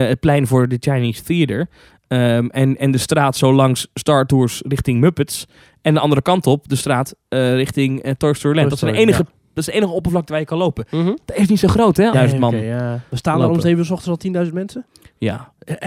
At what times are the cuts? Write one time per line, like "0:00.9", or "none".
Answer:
0:12.1